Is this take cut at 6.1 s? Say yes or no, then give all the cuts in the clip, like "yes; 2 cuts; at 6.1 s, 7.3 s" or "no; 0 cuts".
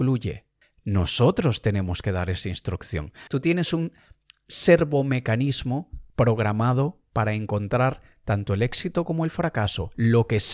yes; 2 cuts; at 3.3 s, 6.1 s